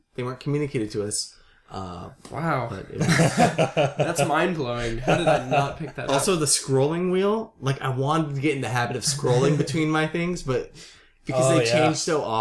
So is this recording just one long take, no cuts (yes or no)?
yes